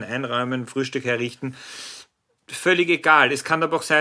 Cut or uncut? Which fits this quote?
uncut